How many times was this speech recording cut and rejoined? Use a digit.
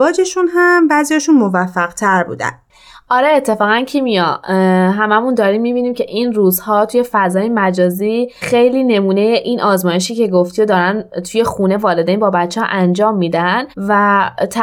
1